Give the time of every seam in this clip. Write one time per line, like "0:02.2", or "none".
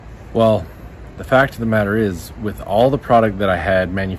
none